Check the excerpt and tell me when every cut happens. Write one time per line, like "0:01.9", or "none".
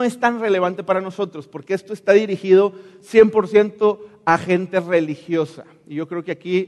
none